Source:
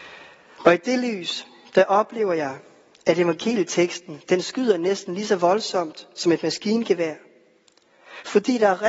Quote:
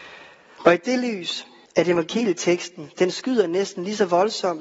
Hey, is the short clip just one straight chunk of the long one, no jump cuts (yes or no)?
no